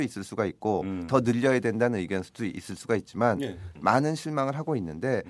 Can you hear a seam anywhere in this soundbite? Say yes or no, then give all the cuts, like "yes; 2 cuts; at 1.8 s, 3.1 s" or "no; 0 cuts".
yes; 1 cut; at 3.8 s